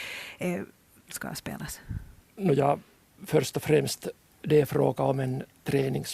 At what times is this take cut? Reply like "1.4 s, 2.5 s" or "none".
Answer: 1.0 s